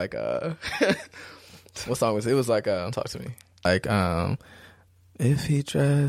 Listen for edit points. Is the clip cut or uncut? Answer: uncut